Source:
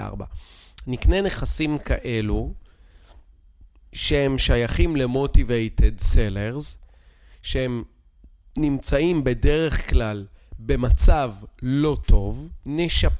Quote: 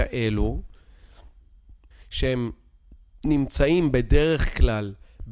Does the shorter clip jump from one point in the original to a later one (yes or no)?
yes